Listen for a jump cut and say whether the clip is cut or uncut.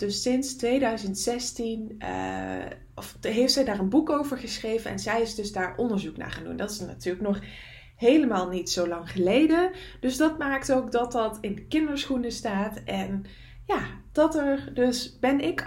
uncut